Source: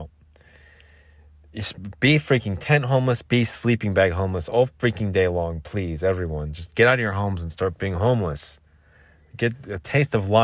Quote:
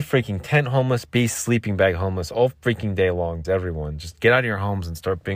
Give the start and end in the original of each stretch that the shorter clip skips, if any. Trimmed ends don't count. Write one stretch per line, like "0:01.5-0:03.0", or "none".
0:05.6-0:06.0